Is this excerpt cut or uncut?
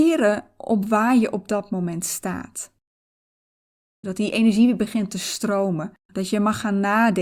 cut